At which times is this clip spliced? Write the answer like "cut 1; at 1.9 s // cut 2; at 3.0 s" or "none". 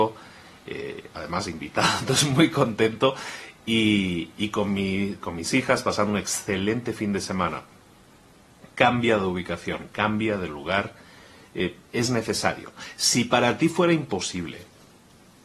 none